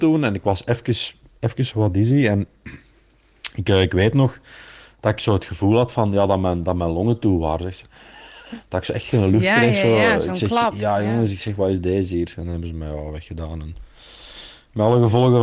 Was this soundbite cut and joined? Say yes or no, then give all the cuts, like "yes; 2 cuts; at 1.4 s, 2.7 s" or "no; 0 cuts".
no; 0 cuts